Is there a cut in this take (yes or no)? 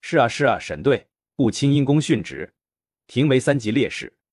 yes